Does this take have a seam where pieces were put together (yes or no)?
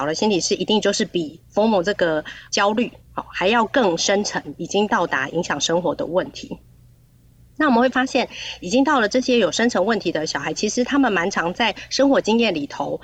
no